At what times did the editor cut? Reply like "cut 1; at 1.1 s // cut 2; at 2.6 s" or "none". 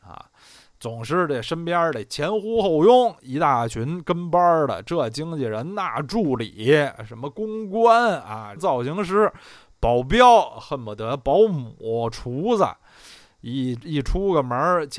cut 1; at 8.6 s